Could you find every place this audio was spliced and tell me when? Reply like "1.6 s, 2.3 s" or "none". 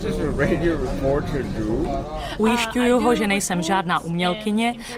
none